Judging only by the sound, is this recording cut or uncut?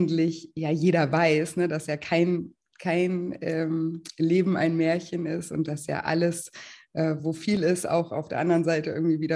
uncut